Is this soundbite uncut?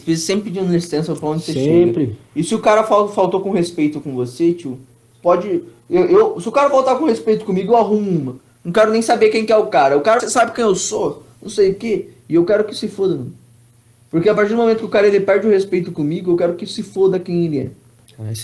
no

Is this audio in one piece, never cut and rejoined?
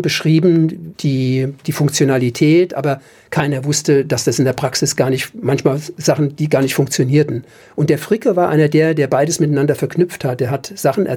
yes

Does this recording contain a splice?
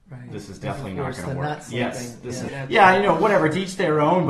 yes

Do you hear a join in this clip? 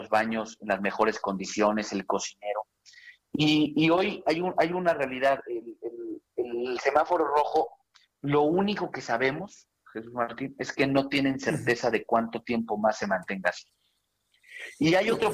no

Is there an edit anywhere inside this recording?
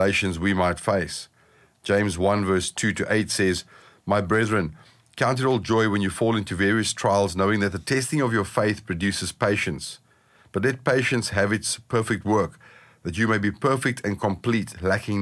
no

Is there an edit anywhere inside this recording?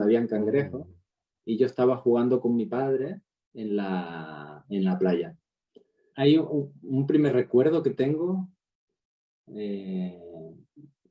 yes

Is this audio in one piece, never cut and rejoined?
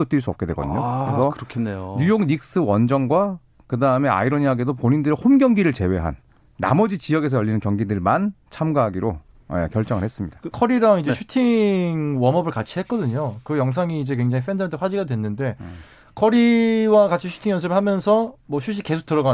no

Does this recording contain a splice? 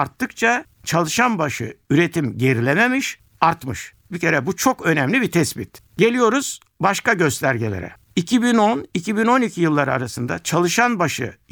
no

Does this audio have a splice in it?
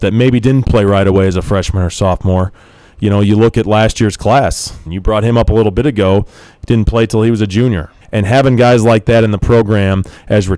yes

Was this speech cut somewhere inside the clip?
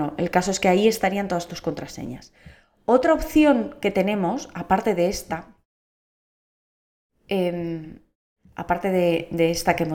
no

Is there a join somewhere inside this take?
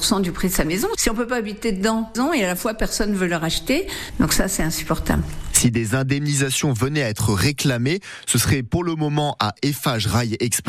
no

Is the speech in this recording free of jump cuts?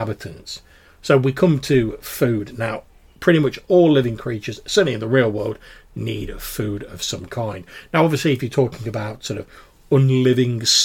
yes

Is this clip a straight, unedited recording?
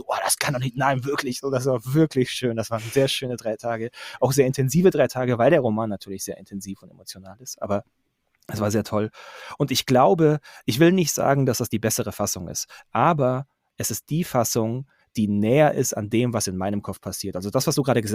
yes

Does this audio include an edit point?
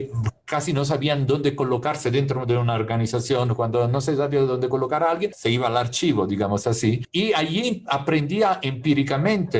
no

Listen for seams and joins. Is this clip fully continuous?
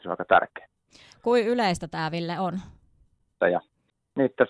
no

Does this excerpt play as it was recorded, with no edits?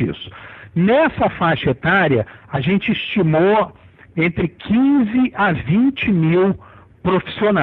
yes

